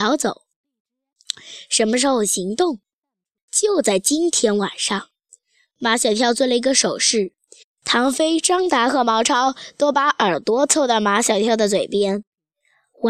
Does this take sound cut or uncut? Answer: uncut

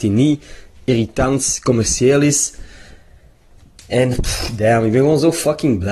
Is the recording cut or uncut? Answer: uncut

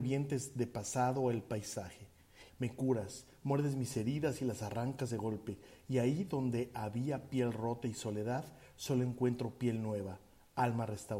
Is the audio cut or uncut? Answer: cut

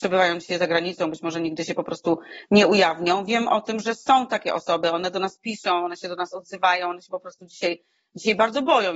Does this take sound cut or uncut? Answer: uncut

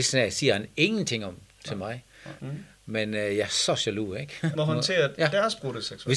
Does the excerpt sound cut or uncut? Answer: cut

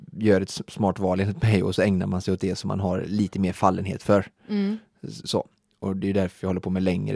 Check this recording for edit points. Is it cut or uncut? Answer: uncut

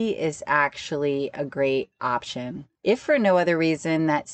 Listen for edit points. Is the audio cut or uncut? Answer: uncut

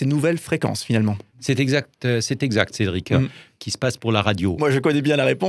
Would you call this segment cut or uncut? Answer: cut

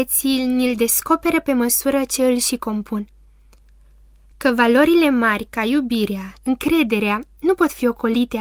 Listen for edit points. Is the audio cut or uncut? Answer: cut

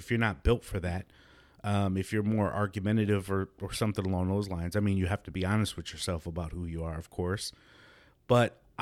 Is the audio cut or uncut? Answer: uncut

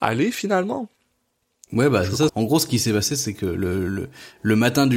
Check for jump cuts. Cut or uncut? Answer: cut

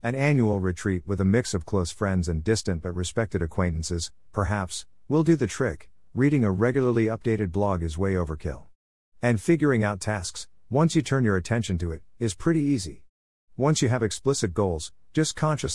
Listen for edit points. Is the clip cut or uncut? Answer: cut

